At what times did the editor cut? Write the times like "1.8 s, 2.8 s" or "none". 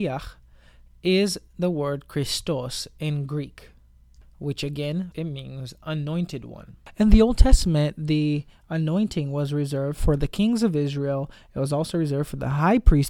5.1 s